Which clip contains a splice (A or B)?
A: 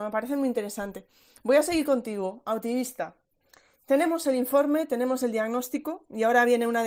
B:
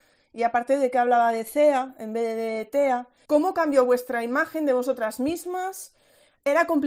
B